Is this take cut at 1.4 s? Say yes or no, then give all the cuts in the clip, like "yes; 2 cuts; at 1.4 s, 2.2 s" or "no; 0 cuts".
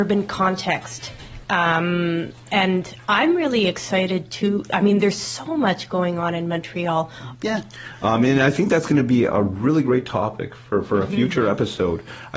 yes; 2 cuts; at 1.4 s, 7.3 s